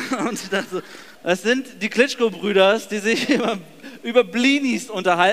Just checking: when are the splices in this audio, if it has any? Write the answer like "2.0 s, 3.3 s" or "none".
1.1 s